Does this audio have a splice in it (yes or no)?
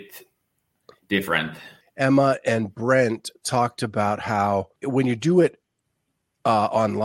yes